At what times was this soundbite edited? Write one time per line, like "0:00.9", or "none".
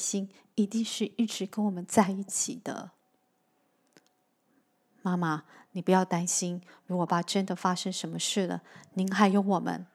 0:07.1